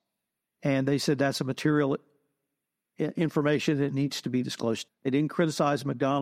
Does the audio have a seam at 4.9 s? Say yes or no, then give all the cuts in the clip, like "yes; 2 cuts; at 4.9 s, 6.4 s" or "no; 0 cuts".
yes; 1 cut; at 4.9 s